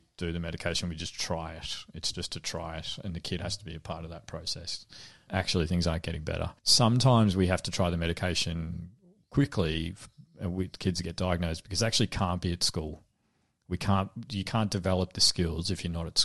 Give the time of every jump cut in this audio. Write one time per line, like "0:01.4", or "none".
0:05.3
0:06.6